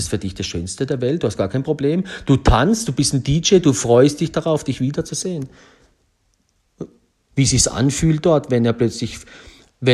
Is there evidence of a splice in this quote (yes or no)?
yes